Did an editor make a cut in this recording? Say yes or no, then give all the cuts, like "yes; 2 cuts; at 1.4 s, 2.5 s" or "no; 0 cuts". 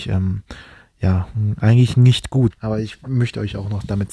yes; 1 cut; at 2.5 s